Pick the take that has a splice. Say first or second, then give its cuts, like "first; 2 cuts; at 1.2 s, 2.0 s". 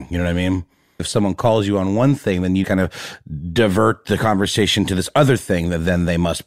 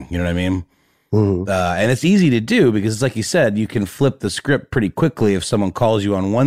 first; 2 cuts; at 1.0 s, 2.6 s